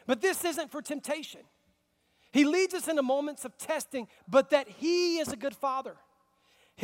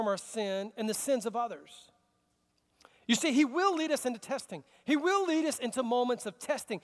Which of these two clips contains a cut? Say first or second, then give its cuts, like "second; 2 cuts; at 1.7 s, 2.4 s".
first; 1 cut; at 4.2 s